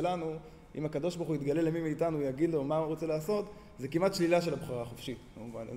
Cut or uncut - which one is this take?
uncut